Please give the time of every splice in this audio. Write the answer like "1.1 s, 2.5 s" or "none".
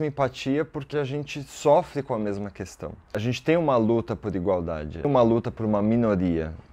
0.9 s